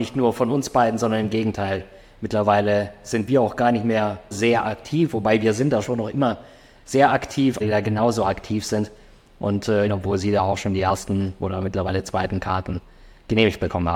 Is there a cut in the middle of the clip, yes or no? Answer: yes